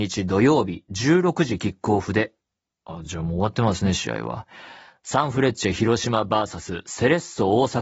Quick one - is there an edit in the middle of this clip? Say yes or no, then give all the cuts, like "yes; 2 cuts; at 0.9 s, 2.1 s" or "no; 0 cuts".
no; 0 cuts